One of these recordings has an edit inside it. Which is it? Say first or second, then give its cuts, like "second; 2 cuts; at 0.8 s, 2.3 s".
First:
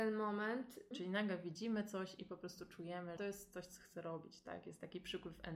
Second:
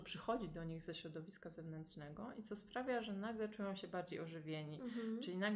first; 2 cuts; at 0.9 s, 3.2 s